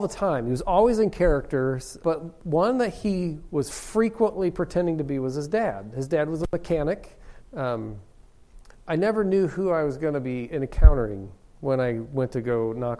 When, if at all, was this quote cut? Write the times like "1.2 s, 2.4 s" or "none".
2.0 s, 7.4 s